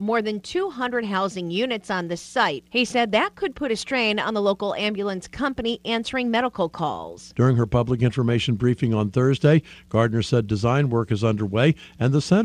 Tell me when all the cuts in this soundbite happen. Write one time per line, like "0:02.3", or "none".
0:07.3